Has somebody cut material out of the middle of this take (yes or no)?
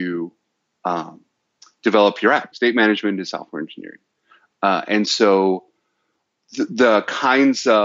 yes